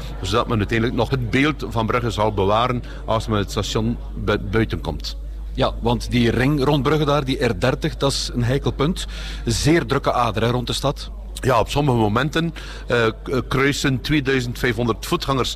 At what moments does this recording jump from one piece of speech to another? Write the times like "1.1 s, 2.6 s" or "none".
1.1 s